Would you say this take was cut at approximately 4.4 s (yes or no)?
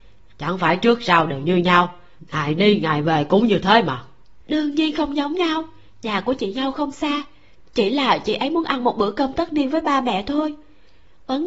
yes